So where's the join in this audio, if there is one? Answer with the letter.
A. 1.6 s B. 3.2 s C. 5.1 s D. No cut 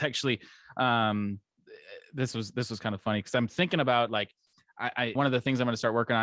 C